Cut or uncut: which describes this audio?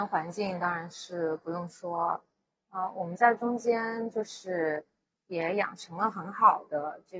uncut